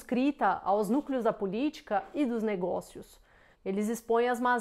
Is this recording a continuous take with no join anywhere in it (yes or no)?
no